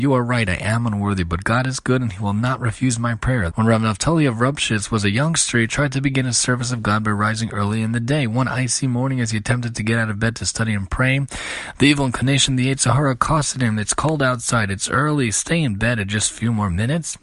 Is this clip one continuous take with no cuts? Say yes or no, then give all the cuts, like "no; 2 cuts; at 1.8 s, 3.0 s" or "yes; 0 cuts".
no; 1 cut; at 3.5 s